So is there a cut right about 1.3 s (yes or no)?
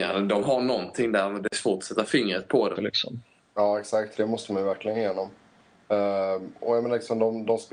no